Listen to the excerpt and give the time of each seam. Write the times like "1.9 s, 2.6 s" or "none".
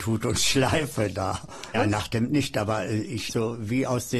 1.7 s, 3.3 s